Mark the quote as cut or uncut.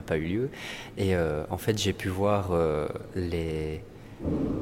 uncut